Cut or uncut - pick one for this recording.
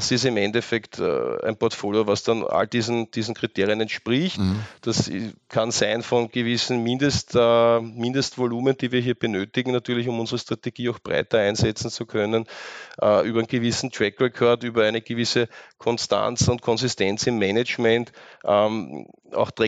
uncut